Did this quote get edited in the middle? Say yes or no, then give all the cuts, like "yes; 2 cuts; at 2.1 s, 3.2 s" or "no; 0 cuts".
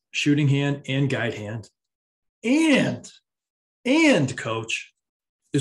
no; 0 cuts